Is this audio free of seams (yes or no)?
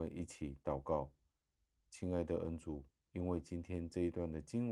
no